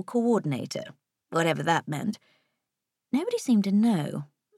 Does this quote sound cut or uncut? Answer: uncut